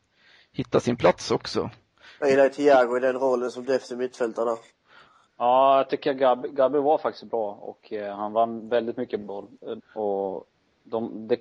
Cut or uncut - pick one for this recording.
cut